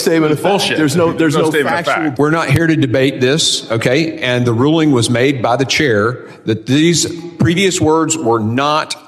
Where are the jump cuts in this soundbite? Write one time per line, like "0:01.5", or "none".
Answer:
0:02.2

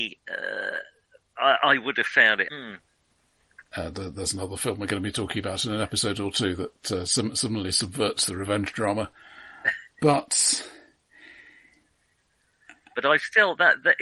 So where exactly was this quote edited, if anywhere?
0:02.5
0:09.9
0:12.9

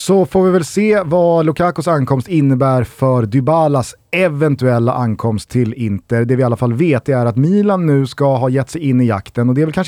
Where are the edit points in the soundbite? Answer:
none

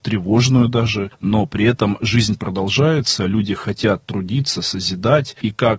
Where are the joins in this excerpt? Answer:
none

